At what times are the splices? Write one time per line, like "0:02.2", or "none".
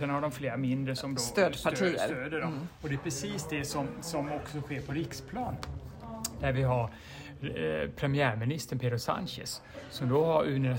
none